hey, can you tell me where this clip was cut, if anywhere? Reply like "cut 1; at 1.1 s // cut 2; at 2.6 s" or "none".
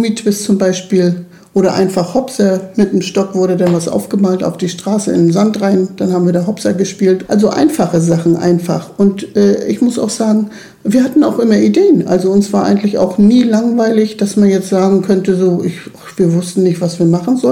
cut 1; at 7.2 s